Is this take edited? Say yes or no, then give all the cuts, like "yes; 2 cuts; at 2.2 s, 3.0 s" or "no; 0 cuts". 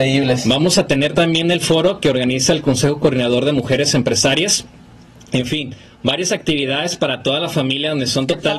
no; 0 cuts